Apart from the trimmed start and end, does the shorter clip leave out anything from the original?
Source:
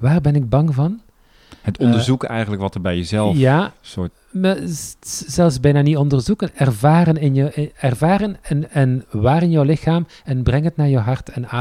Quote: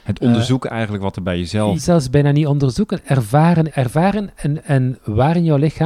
yes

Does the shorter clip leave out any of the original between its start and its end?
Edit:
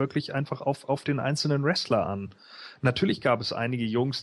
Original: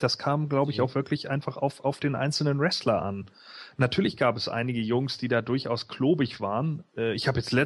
no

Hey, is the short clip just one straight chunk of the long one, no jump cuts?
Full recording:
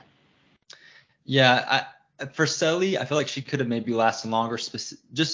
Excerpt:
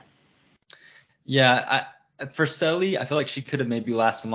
yes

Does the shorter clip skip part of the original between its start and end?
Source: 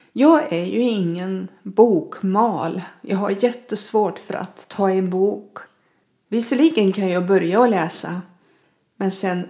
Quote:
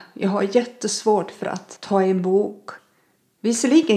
no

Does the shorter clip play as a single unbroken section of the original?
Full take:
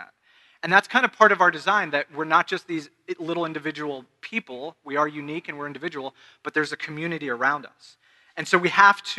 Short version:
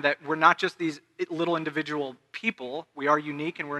yes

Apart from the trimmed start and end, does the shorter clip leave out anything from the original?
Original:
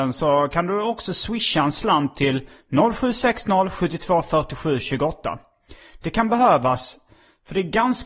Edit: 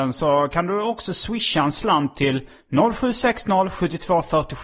no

